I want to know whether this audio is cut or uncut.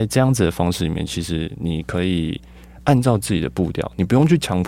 uncut